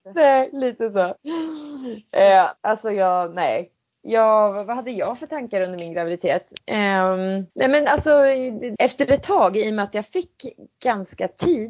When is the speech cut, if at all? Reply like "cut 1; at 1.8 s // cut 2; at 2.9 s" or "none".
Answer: cut 1; at 2.6 s // cut 2; at 7.5 s // cut 3; at 8.8 s